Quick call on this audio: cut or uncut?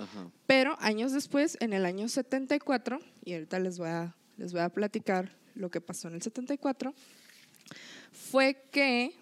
uncut